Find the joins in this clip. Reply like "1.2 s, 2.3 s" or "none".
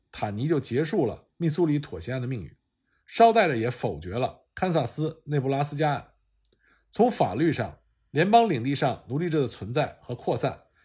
none

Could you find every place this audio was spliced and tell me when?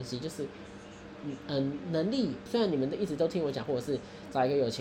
2.5 s, 3.6 s

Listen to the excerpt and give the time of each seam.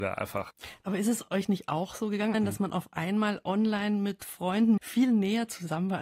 2.3 s, 4.8 s

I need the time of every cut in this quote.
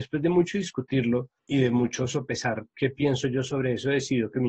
1.4 s

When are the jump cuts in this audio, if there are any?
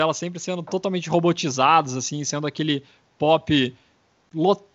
none

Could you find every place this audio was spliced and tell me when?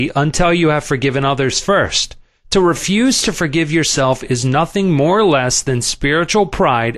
none

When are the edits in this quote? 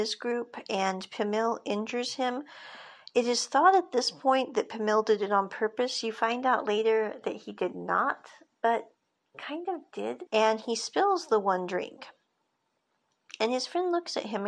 10.3 s

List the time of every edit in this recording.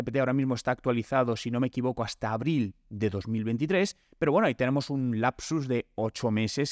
none

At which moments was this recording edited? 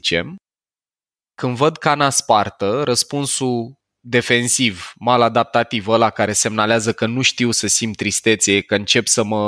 none

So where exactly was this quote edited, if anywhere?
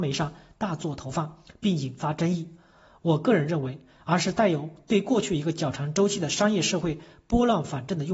4.0 s

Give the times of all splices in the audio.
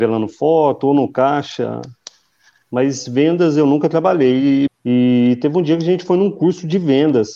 4.7 s

